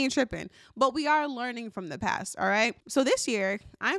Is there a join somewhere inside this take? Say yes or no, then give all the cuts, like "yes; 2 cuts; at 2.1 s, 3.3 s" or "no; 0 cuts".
yes; 1 cut; at 2.8 s